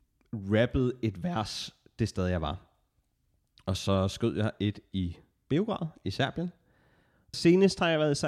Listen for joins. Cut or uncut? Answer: cut